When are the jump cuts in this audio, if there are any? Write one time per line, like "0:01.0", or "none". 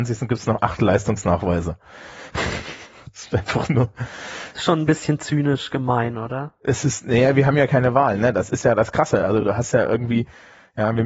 none